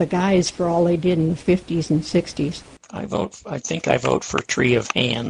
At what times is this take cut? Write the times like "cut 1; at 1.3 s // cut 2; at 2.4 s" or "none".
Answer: cut 1; at 2.8 s